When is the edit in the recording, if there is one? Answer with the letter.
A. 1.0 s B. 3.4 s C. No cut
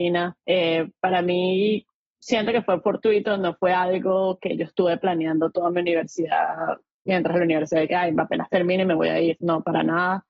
C